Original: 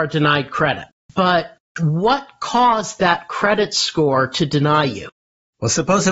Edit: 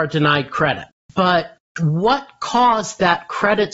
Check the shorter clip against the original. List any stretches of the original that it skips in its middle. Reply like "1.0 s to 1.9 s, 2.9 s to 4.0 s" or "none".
none